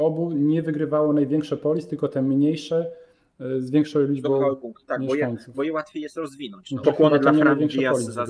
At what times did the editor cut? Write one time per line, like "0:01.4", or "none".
0:06.8